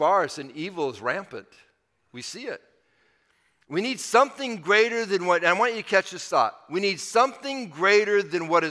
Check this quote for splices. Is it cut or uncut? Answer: uncut